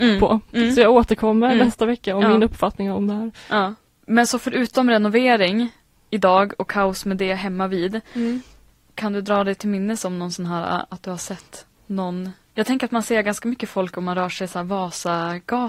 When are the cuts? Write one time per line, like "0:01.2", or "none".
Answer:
none

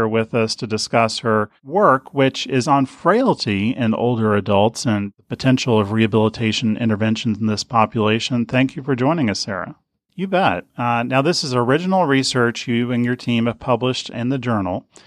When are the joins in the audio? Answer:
0:10.1
0:14.1

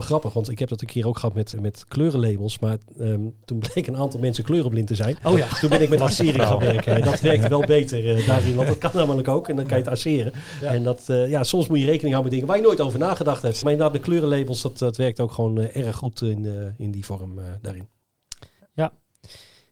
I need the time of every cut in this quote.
0:01.5
0:13.6

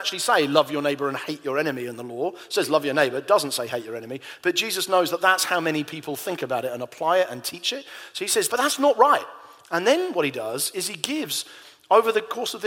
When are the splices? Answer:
0:08.5
0:09.6

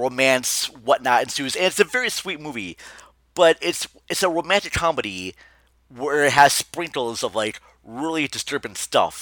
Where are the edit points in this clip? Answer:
none

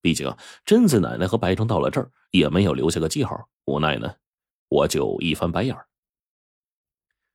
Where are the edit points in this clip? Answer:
0:01.6
0:03.5

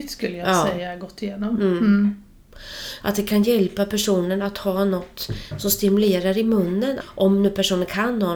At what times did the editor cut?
0:03.0
0:07.0

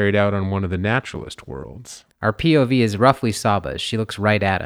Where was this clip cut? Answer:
0:02.1

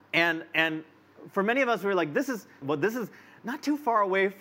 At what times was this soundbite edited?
0:02.6

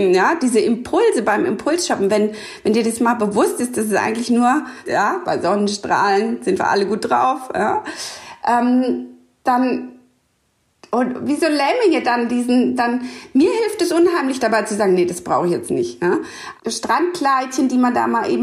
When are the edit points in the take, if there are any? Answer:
0:04.9
0:12.8
0:16.6

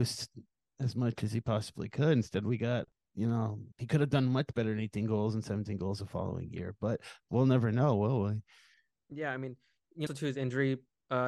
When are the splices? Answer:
0:03.7
0:10.1

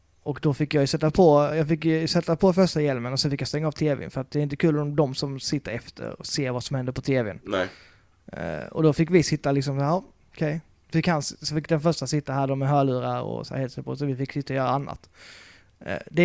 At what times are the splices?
none

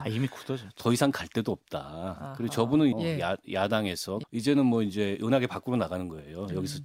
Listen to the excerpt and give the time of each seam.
0:02.9
0:04.2

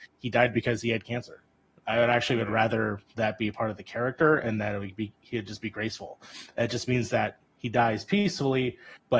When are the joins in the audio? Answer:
none

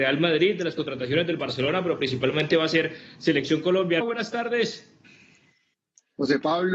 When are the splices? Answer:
0:04.0

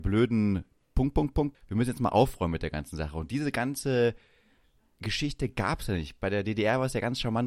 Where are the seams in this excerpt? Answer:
0:01.5

